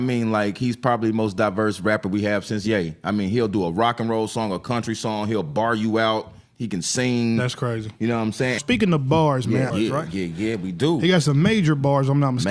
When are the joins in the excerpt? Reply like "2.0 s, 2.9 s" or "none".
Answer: 8.6 s, 9.7 s